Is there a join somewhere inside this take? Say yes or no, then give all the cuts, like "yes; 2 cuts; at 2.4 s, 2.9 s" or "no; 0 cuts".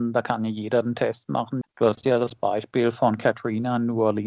yes; 1 cut; at 1.6 s